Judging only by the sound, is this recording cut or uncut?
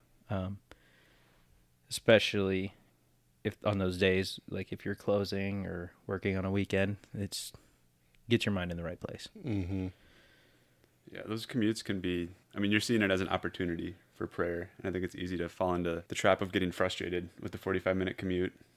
cut